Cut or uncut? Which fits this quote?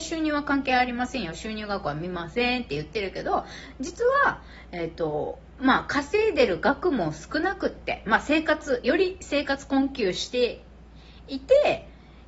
uncut